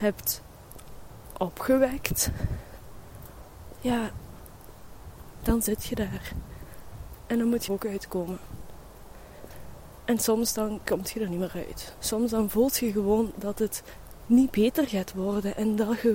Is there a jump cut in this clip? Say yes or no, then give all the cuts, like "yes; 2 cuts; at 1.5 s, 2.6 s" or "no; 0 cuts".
yes; 1 cut; at 7.7 s